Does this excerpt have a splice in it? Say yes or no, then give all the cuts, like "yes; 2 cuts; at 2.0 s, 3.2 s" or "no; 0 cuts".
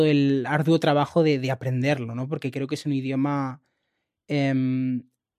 no; 0 cuts